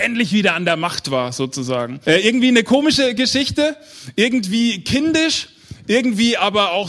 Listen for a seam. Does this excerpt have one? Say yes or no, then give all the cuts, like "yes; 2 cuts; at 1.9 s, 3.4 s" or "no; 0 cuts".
yes; 1 cut; at 2.0 s